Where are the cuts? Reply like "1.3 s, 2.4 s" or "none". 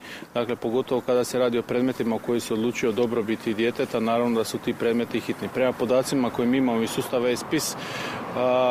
none